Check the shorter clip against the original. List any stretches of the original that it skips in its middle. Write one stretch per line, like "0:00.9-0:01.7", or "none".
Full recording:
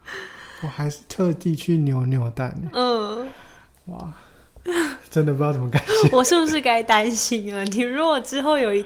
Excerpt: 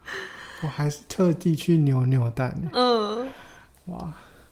none

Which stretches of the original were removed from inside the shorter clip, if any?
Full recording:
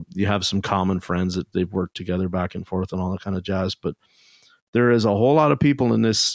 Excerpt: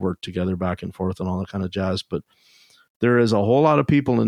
none

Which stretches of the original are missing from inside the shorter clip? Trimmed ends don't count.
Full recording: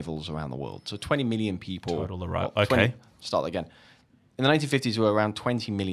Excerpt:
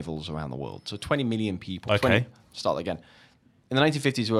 0:01.9-0:02.5

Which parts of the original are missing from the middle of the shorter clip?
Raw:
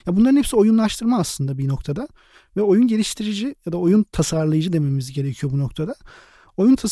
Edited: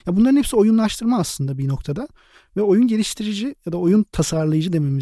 none

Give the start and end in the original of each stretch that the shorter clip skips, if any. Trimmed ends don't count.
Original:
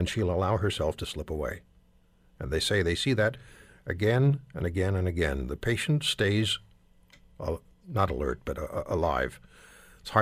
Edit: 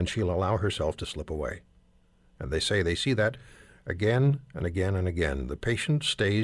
none

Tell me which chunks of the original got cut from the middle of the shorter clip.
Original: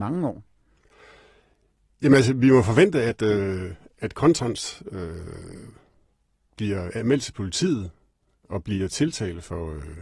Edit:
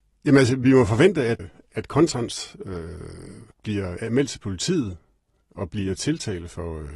0:03.2-0:03.7
0:05.8-0:06.4

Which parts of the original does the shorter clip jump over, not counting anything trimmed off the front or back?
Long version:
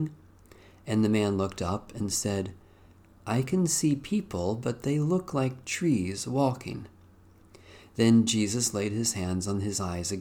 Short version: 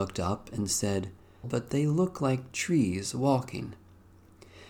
0:02.9-0:04.6

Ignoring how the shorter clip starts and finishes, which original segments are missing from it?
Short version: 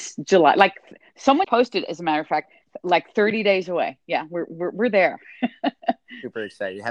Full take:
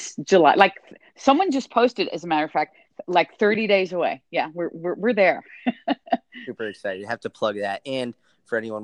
0:01.4-0:01.7

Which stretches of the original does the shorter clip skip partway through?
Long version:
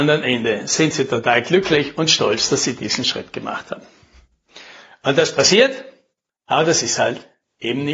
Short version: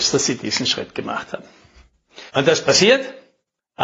0:04.7-0:05.0

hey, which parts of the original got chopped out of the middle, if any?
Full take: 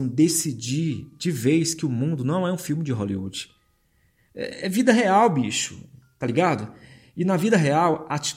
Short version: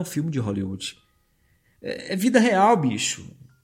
none

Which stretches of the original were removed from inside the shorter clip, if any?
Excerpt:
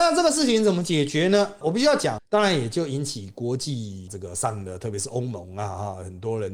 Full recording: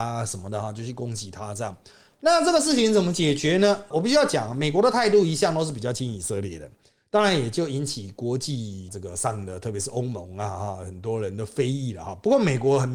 0:04.5-0:07.0

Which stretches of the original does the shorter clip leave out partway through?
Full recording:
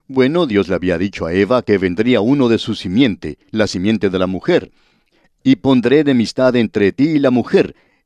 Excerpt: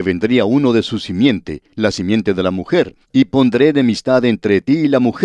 0:04.8-0:05.3

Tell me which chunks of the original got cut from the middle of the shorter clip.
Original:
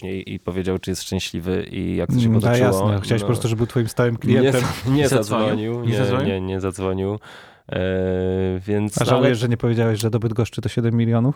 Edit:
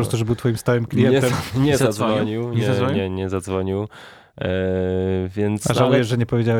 none

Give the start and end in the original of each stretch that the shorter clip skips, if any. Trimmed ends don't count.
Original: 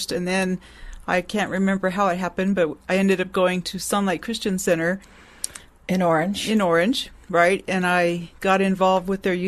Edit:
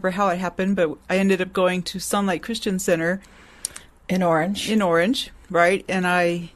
none

